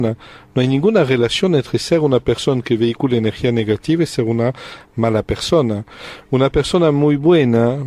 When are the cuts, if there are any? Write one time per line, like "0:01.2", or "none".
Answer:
none

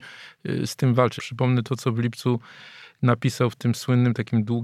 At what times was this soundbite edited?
0:01.2

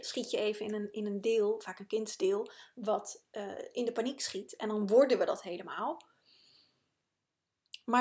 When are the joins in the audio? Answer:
none

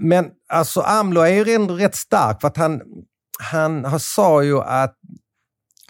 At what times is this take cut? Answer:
none

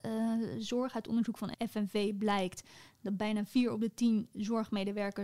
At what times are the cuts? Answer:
none

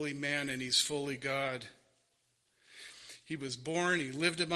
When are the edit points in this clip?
0:03.2

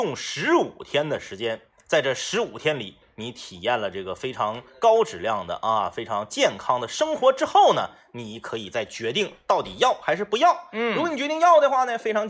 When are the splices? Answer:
none

